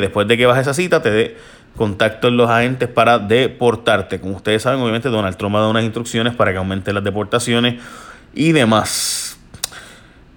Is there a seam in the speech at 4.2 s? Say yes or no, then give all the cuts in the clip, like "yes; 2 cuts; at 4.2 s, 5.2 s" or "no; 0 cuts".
no; 0 cuts